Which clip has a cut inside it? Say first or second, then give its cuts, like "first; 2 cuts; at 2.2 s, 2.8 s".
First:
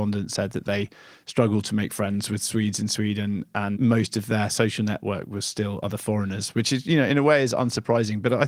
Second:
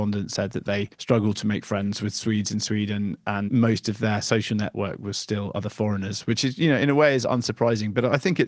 second; 1 cut; at 0.9 s